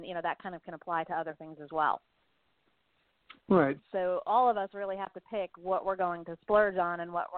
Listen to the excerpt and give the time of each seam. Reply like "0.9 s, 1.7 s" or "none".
3.8 s